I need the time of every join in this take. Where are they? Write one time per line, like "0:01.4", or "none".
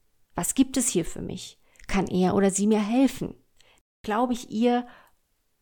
none